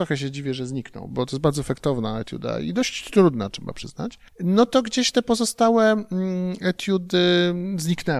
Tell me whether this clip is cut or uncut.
cut